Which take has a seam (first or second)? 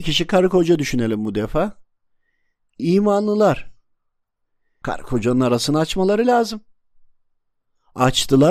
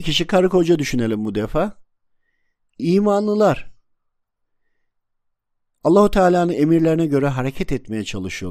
first